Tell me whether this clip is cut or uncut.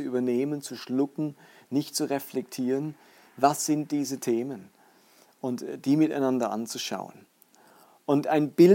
uncut